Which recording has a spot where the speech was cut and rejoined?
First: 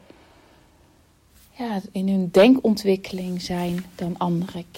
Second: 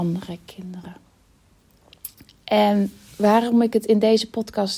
first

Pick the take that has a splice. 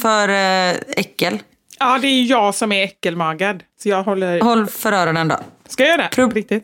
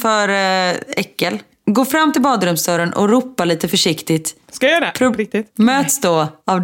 second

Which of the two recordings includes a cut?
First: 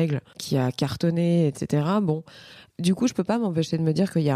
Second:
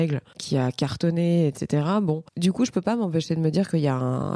second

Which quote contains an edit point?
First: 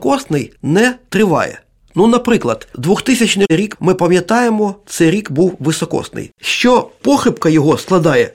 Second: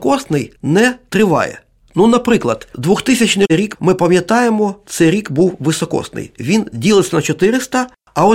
first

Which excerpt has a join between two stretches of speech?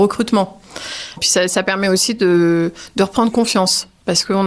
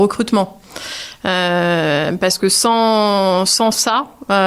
first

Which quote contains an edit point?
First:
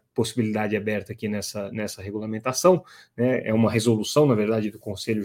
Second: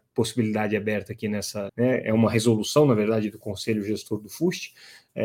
second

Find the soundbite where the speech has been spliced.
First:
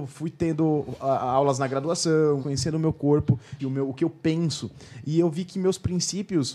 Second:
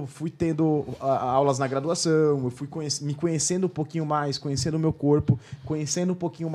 first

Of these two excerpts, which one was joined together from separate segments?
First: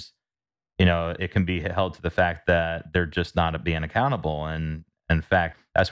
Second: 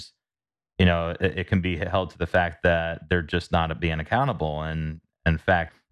first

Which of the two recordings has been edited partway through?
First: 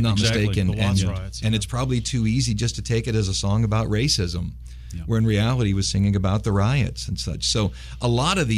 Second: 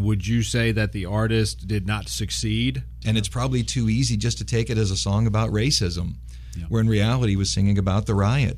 second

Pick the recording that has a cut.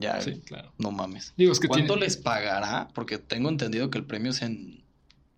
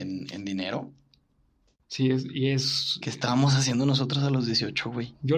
second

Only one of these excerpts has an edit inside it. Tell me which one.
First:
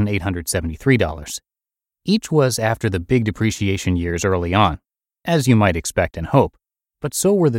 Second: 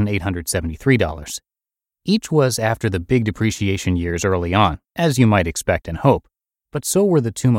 second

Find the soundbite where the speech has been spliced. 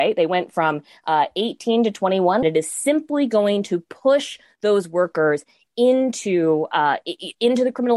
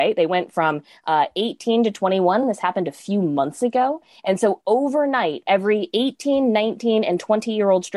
first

